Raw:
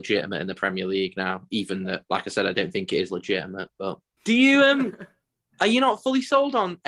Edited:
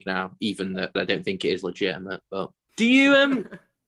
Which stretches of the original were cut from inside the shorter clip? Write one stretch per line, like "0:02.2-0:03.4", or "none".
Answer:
0:02.1-0:02.4